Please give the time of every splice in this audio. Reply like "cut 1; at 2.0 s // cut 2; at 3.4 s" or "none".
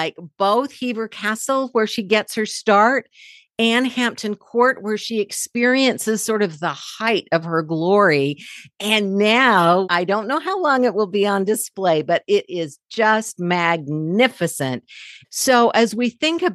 cut 1; at 9.8 s // cut 2; at 15.2 s